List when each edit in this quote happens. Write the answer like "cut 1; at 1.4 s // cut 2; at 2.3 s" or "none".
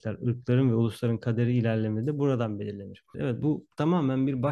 cut 1; at 3.1 s